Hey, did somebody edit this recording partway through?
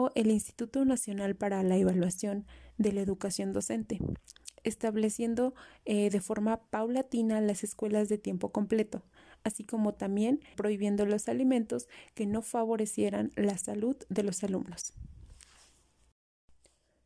yes; 1 cut; at 10.5 s

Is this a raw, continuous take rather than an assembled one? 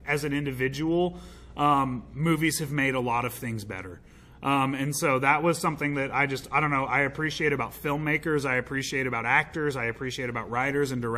yes; 0 cuts

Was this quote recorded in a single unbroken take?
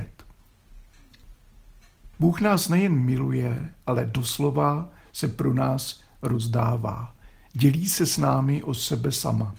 no; 1 cut; at 2.1 s

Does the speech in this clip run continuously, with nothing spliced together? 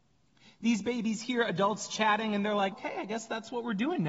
no; 1 cut; at 2.7 s

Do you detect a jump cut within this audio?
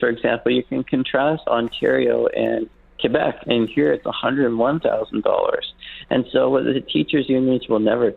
yes; 2 cuts; at 1.5 s, 3.4 s

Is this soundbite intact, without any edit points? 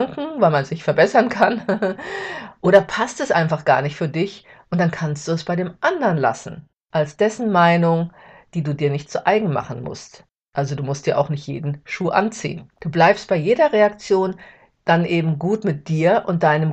no; 1 cut; at 12.7 s

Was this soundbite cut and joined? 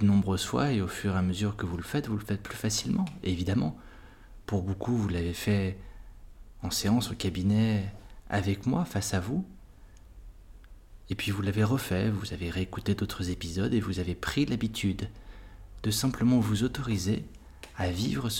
no; 0 cuts

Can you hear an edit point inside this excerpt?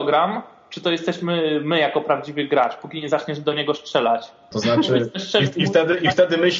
yes; 1 cut; at 4.5 s

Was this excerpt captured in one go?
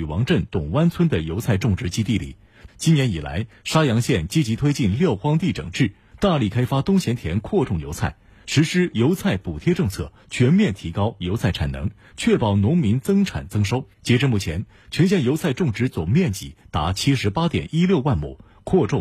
no; 2 cuts; at 2.7 s, 13.9 s

